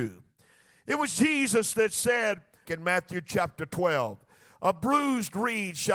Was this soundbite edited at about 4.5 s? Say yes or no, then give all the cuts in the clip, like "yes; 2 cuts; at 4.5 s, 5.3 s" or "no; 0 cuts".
no; 1 cut; at 2.7 s